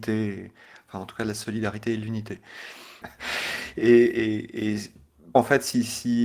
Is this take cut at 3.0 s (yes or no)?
yes